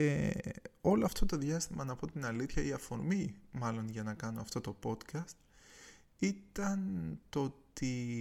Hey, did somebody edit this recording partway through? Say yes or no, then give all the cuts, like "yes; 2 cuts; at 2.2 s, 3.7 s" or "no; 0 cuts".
no; 0 cuts